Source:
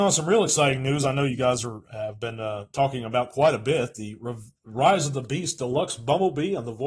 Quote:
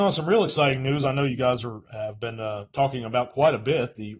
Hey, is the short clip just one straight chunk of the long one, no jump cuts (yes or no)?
yes